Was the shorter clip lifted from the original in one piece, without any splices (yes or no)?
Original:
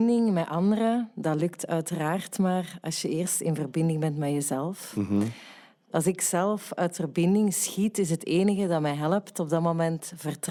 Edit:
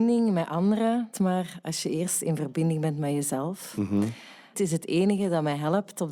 no